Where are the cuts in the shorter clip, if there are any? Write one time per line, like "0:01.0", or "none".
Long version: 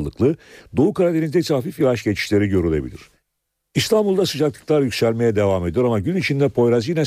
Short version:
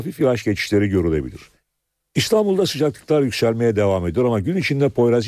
none

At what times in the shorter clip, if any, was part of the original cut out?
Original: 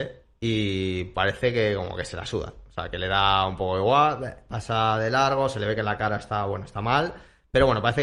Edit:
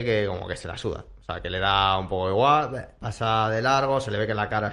none

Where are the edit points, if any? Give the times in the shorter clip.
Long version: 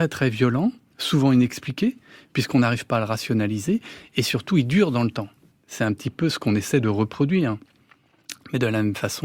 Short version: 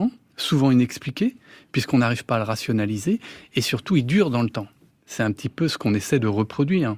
none

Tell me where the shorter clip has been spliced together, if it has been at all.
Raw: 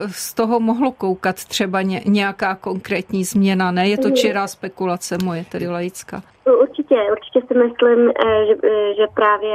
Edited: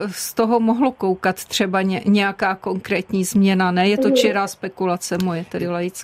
none

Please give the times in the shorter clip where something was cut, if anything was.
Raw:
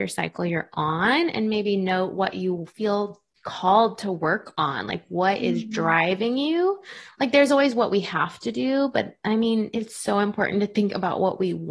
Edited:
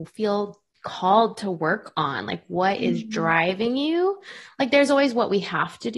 none

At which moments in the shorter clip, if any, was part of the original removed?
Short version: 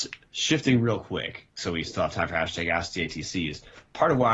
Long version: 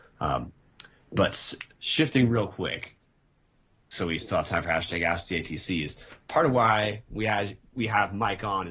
0:01.5

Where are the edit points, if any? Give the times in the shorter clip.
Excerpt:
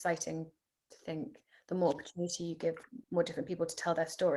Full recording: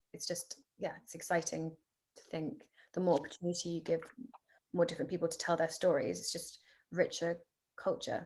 0:03.0

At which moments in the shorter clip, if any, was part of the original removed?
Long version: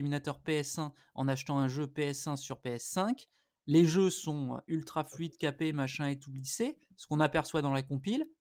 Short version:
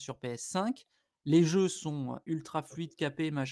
none

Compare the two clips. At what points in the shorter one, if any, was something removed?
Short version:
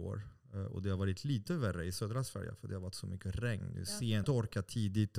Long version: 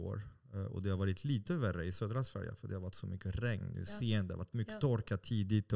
0:04.2

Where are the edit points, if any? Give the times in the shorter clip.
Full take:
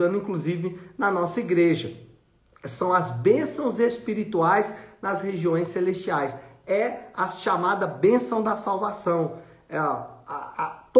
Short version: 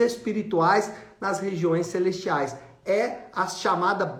none

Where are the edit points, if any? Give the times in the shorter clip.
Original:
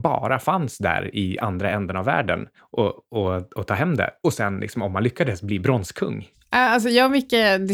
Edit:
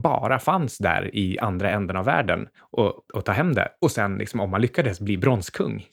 0:03.1

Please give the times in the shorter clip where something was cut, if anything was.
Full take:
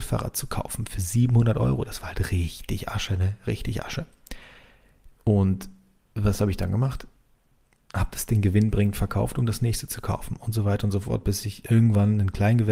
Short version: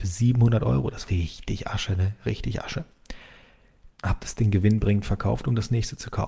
0:01.1
0:03.9

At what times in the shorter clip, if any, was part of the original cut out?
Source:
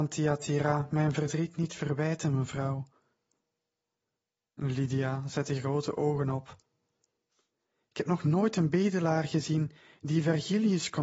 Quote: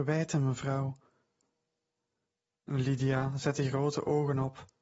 none

